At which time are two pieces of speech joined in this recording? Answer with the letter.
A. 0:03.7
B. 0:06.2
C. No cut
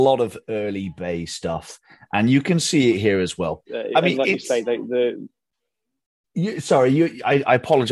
A